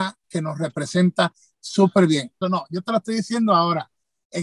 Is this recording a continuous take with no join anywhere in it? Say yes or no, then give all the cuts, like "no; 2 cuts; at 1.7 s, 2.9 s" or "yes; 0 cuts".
no; 1 cut; at 2.4 s